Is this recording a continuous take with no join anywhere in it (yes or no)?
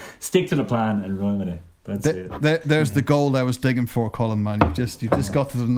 yes